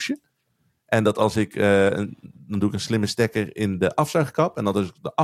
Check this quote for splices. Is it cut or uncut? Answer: uncut